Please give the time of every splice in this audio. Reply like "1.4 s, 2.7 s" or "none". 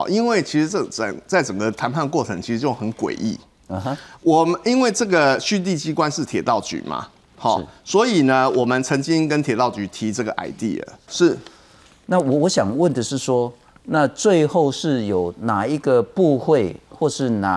11.1 s